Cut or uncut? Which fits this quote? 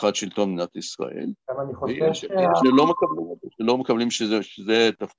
cut